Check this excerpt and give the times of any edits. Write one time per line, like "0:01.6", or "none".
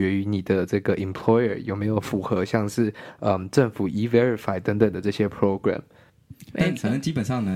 0:06.5